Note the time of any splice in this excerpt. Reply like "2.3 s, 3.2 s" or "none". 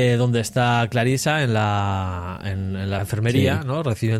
3.0 s